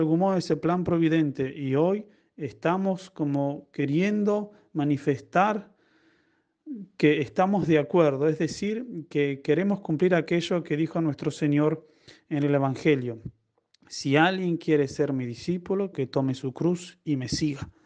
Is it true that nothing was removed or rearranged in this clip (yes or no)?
no